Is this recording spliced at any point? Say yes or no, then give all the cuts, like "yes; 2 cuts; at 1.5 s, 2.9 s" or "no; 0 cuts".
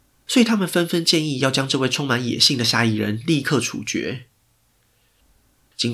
no; 0 cuts